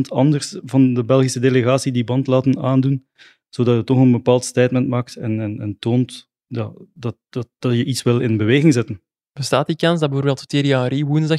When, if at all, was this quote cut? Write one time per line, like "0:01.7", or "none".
none